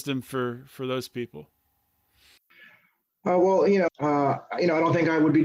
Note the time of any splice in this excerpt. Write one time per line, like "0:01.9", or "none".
0:03.9